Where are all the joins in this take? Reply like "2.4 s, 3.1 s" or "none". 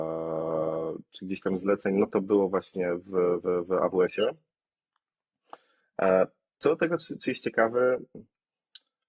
none